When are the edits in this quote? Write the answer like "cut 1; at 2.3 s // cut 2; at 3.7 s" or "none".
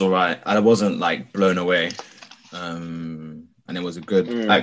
cut 1; at 3.7 s